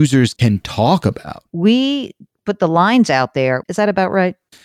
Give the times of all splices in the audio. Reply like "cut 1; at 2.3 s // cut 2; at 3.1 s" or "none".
cut 1; at 1.5 s // cut 2; at 3.6 s